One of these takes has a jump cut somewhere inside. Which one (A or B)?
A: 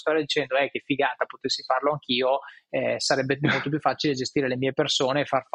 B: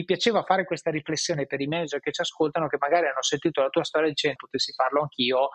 B